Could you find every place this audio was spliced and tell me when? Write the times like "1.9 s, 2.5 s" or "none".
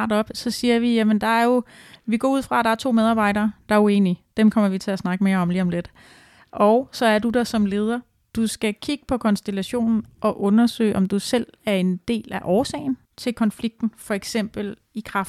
13.0 s

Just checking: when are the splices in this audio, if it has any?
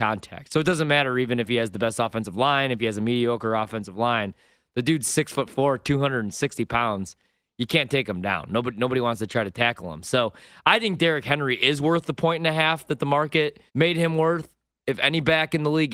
13.7 s

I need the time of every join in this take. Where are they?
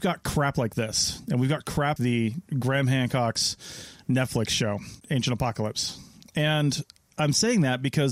2.0 s

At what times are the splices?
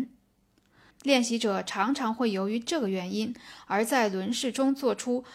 0.9 s

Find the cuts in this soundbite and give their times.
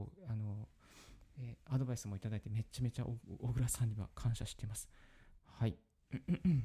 5.4 s

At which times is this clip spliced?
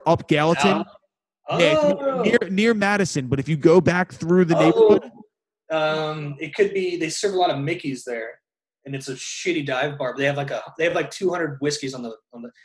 none

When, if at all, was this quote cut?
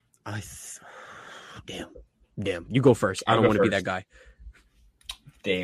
none

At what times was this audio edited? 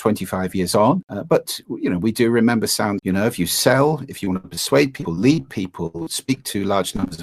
3.0 s

